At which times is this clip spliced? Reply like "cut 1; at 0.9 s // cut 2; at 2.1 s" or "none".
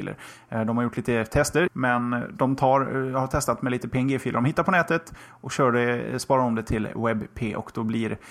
cut 1; at 1.7 s